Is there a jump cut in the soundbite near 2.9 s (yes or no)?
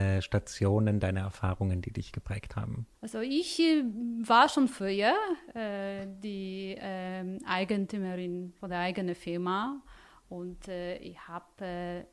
yes